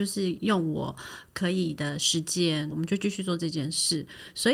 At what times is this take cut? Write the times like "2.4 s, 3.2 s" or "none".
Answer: 2.7 s